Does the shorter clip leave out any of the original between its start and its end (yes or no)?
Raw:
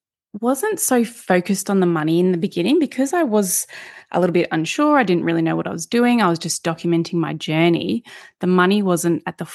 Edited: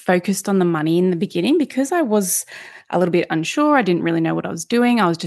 no